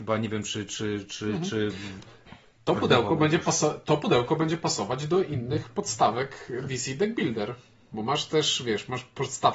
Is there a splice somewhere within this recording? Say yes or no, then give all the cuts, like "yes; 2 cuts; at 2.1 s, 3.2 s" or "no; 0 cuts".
yes; 1 cut; at 2.0 s